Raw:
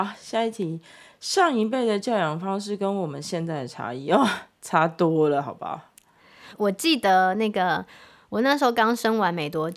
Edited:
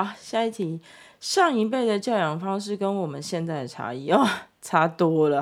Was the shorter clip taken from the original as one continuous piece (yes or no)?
yes